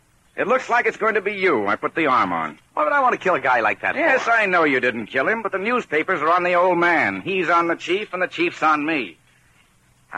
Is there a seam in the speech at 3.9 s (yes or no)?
no